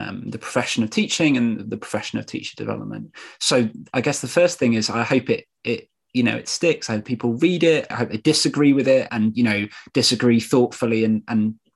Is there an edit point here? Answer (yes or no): yes